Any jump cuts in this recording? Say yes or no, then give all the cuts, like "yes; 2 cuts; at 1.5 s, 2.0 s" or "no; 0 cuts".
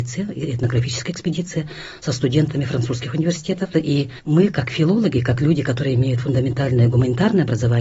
yes; 1 cut; at 3.7 s